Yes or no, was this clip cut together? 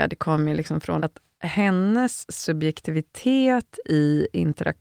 yes